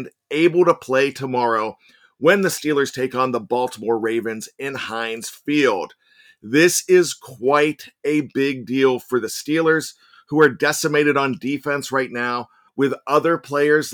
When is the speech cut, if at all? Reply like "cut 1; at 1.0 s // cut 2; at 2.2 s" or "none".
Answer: cut 1; at 12.7 s